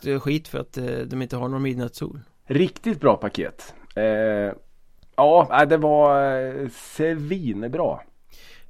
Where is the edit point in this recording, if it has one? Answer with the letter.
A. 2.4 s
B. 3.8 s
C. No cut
A